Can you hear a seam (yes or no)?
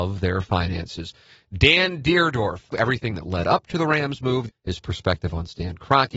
yes